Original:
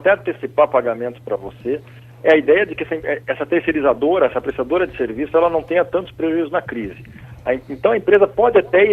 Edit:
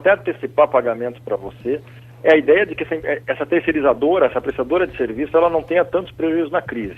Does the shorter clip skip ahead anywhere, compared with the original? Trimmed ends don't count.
no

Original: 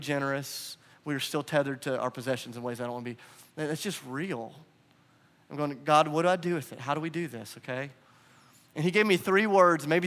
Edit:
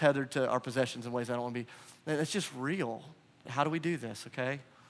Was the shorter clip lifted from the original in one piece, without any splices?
no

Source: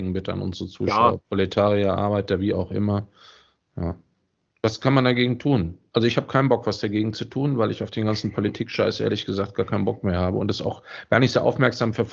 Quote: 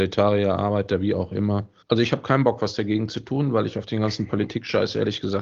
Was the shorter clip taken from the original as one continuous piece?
no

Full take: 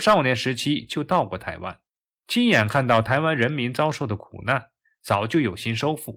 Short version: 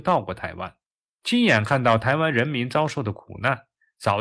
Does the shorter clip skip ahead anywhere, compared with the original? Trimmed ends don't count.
no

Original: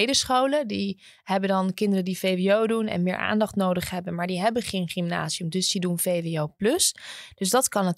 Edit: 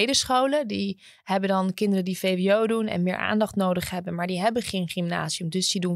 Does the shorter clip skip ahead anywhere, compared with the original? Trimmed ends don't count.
no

